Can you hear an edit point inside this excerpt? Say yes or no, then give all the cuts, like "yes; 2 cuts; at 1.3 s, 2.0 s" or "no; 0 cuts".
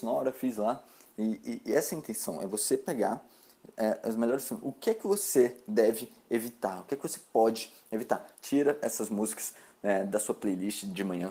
yes; 1 cut; at 8.3 s